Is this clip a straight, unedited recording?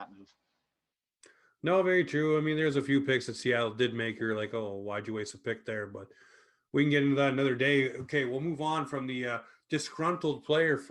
yes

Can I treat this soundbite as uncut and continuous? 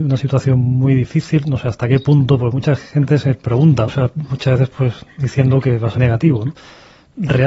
no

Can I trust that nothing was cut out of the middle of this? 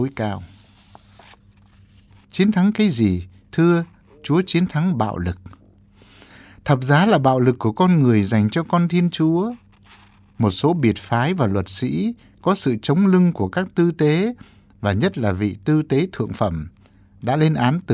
no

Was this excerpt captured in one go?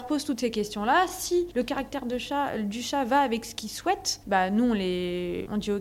yes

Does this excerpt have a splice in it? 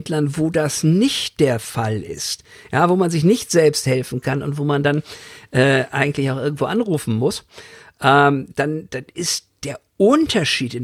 no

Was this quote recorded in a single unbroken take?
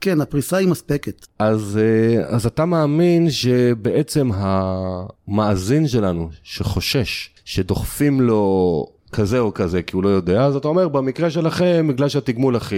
no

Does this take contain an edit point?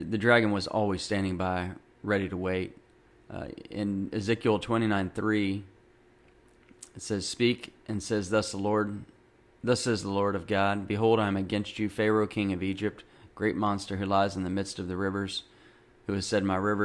no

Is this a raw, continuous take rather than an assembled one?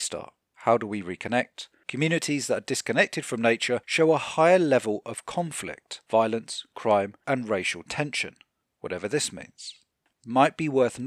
no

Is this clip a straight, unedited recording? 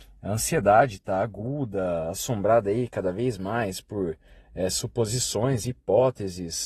yes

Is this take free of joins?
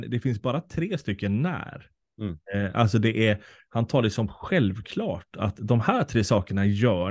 yes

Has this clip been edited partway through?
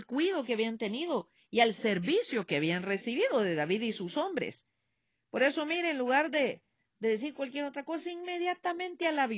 no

